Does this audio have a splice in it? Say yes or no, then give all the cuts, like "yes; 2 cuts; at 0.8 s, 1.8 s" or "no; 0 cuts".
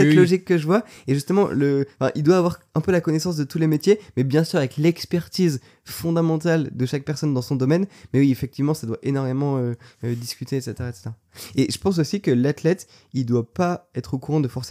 no; 0 cuts